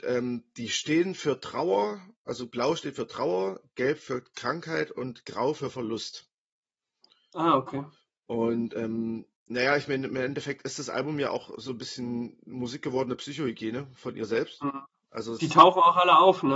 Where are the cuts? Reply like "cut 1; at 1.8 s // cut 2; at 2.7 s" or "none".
cut 1; at 9.4 s